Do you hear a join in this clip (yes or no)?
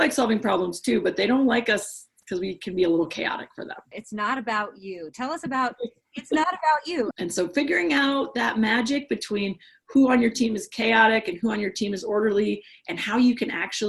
yes